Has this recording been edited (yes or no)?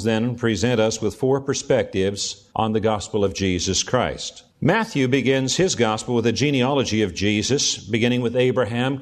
yes